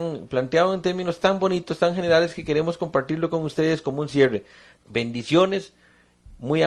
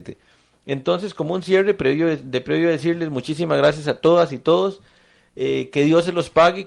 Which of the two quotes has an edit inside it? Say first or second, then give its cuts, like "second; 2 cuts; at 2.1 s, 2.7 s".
first; 1 cut; at 4.8 s